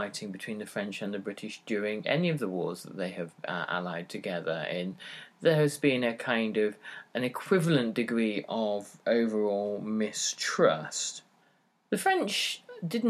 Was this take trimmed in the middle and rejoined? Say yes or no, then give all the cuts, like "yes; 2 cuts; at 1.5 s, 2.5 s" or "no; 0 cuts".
no; 0 cuts